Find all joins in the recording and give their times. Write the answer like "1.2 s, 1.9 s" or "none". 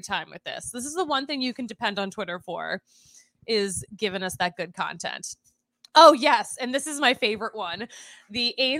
none